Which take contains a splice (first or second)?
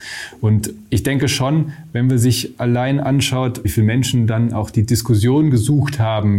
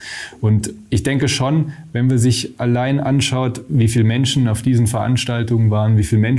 first